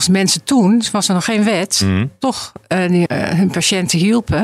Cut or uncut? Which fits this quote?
cut